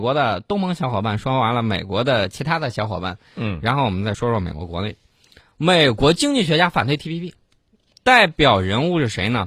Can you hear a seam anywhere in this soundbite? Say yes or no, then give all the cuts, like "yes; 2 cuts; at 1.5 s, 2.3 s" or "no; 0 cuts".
no; 0 cuts